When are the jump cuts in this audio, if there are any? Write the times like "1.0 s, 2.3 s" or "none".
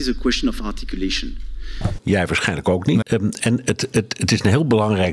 2.0 s, 3.0 s